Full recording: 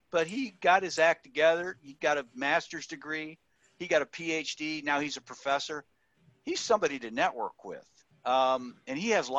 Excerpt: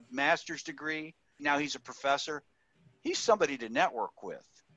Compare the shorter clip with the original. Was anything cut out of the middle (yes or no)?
yes